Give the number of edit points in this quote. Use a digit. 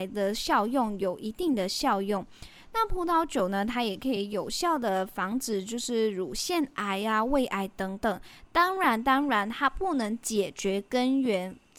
0